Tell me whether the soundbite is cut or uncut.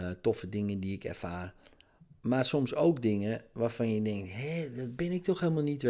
uncut